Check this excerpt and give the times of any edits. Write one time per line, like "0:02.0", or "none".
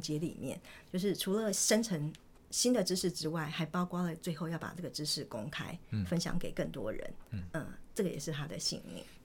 none

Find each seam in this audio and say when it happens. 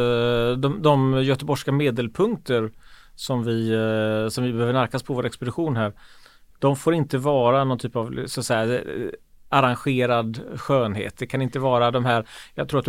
none

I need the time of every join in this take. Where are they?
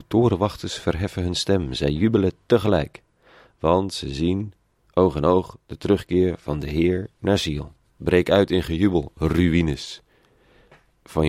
0:08.0

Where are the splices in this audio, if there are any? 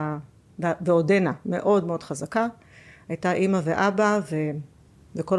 none

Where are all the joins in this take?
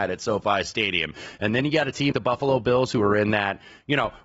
0:02.1

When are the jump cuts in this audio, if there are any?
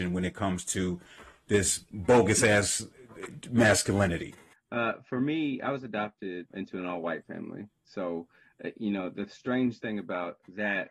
0:04.5
0:06.5

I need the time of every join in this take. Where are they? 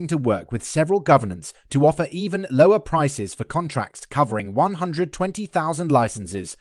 none

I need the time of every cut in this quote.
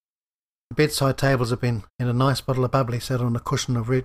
0:02.0

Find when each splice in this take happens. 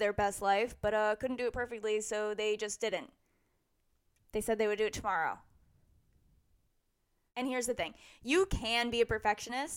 none

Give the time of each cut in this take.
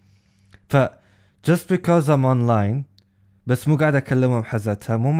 none

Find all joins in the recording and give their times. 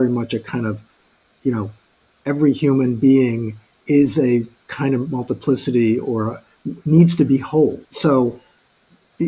0:07.8

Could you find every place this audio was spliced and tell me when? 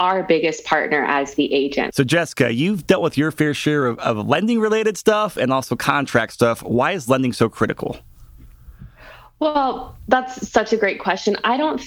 0:01.9

